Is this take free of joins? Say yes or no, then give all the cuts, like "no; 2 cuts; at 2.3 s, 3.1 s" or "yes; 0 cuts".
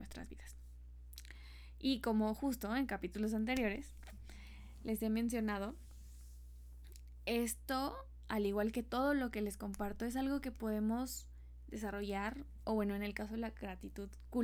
yes; 0 cuts